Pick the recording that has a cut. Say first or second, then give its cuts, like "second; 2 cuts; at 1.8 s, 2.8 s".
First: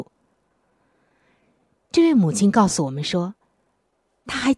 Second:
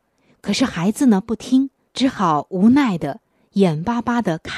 second; 1 cut; at 1.9 s